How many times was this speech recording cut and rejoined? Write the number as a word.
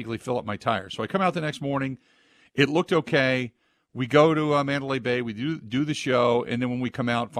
zero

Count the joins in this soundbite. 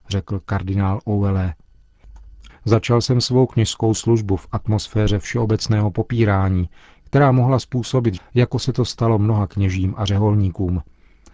two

